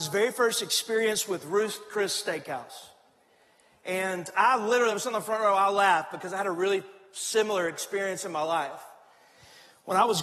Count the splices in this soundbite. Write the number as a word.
zero